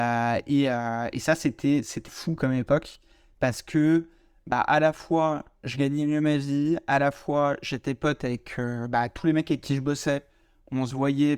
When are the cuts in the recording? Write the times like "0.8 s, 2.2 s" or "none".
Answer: 2.1 s